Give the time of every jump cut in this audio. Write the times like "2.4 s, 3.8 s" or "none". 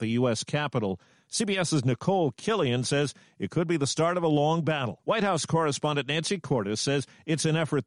5.0 s